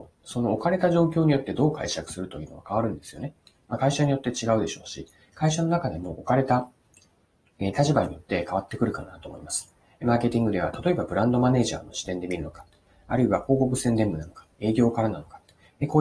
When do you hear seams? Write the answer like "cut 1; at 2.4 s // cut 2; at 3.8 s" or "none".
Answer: none

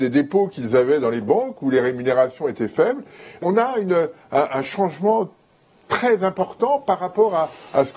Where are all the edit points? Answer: cut 1; at 3.4 s

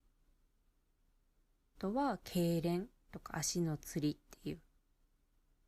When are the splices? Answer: none

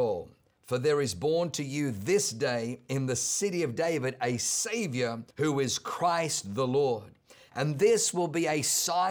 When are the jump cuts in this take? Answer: cut 1; at 5.3 s

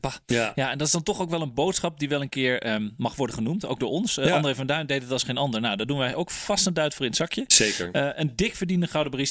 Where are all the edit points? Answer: none

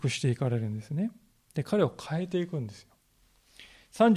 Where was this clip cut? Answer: none

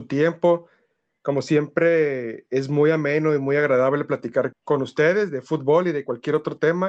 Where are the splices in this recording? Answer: cut 1; at 4.5 s

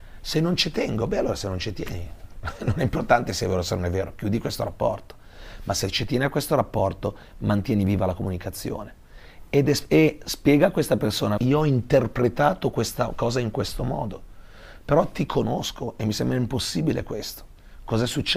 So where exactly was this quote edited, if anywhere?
cut 1; at 11.4 s

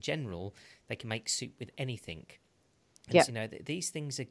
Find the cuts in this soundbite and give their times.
cut 1; at 3.3 s

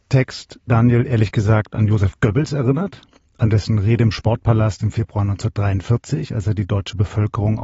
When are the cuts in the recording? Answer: none

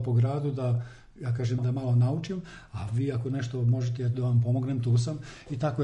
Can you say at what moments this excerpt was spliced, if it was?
cut 1; at 1.6 s

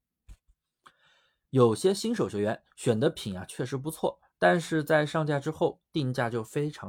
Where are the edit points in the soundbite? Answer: none

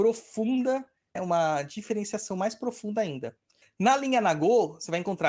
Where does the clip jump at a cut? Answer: cut 1; at 1.2 s // cut 2; at 3.6 s

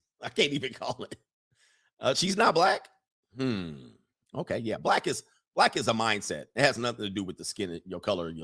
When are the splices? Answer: none

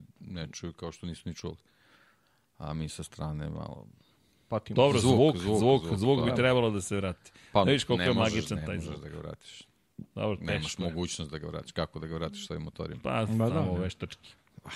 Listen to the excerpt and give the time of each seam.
none

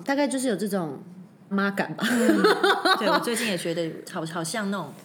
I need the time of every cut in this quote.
cut 1; at 1.5 s // cut 2; at 4.0 s

